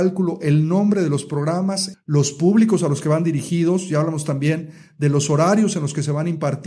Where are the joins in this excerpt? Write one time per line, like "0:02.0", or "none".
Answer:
0:01.9